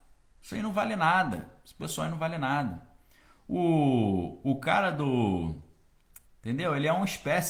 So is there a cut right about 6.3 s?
yes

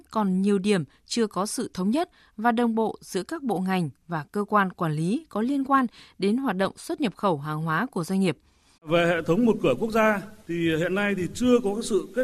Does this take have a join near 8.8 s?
yes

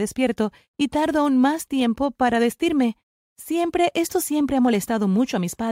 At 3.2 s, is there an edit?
yes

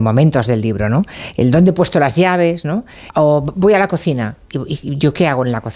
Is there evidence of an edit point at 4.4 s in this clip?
no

